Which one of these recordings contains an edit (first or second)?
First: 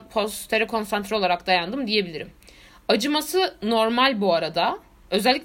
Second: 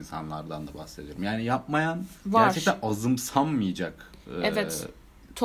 second